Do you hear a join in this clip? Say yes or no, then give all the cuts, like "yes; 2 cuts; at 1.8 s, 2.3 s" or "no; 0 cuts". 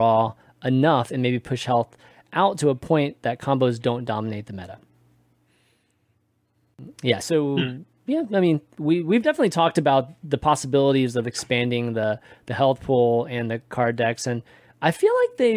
no; 0 cuts